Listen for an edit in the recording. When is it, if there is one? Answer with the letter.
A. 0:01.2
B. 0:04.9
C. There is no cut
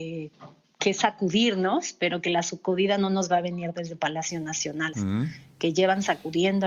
B